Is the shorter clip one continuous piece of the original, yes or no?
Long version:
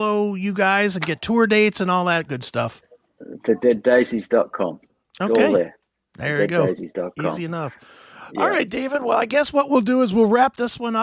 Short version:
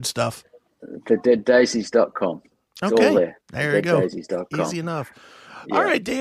no